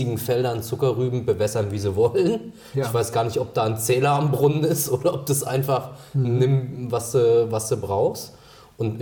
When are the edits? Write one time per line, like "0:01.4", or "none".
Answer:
none